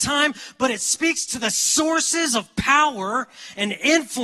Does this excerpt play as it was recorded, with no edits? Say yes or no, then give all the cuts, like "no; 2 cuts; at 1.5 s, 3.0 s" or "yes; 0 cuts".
yes; 0 cuts